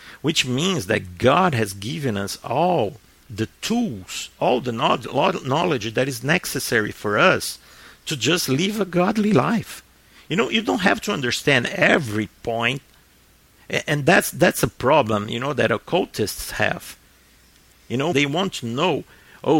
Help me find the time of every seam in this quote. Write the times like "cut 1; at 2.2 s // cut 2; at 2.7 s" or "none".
cut 1; at 18.1 s